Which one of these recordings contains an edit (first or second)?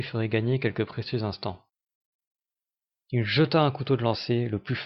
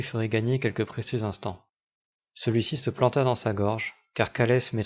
second